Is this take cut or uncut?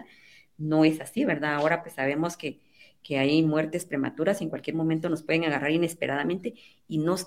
uncut